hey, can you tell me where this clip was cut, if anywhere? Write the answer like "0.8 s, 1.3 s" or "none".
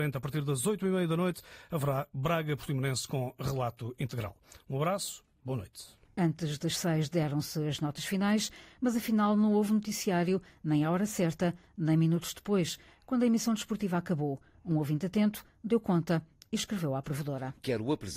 none